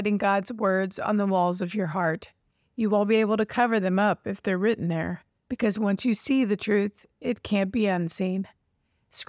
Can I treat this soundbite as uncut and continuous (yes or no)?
yes